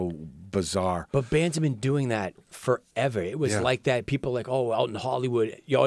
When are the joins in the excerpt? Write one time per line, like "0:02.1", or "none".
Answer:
none